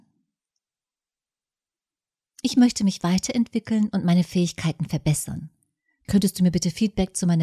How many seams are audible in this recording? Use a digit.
0